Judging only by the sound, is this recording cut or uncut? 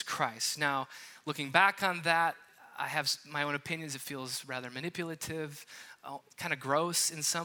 uncut